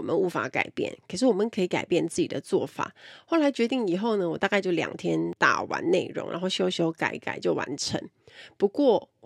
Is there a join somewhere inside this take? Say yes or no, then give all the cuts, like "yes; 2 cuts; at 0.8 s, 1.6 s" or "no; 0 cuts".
no; 0 cuts